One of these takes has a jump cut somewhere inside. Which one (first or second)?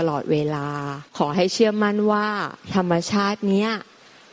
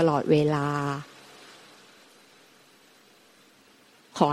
first